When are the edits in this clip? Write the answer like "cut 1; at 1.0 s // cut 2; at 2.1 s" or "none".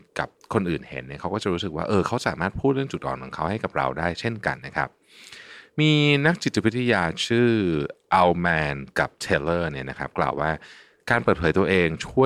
cut 1; at 4.6 s